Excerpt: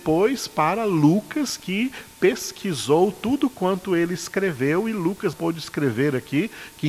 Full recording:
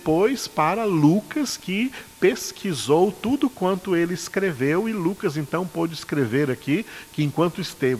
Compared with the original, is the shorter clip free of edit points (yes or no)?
no